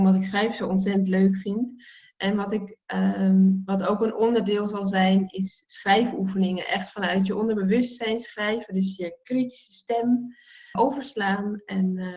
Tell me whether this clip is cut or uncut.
cut